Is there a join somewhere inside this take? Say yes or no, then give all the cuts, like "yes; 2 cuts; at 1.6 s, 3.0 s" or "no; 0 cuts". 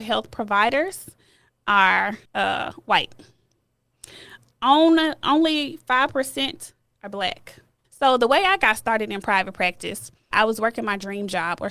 yes; 3 cuts; at 2.2 s, 7.8 s, 10.3 s